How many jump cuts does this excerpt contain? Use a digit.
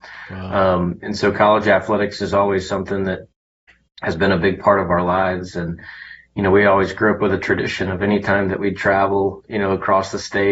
0